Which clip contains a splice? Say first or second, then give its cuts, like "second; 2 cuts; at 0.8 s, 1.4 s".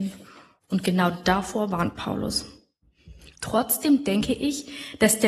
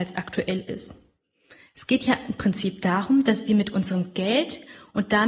first; 1 cut; at 3.3 s